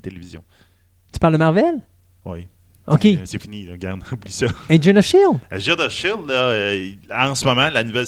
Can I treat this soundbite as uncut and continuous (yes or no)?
yes